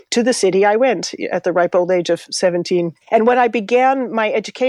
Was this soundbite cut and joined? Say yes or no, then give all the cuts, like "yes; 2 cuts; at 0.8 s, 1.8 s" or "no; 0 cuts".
yes; 1 cut; at 3.0 s